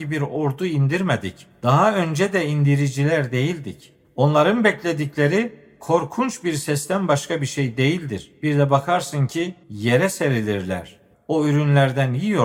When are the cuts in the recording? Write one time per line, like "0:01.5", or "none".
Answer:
0:09.6
0:11.1